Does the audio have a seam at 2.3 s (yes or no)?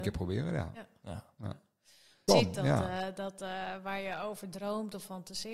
yes